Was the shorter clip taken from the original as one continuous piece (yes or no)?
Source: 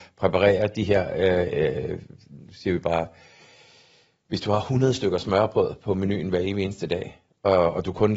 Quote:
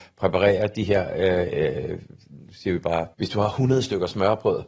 no